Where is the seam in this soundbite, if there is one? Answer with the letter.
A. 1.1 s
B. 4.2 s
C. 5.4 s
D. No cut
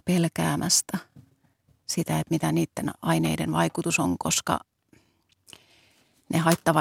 D